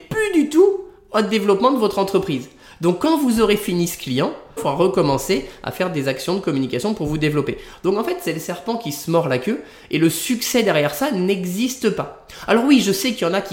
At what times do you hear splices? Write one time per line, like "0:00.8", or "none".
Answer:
0:04.6